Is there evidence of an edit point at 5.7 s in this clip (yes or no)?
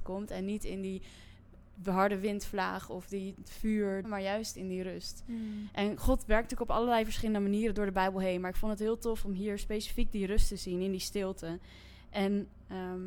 no